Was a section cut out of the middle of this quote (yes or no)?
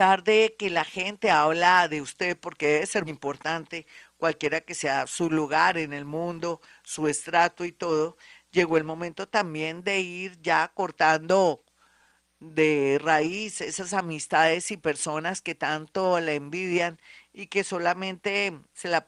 yes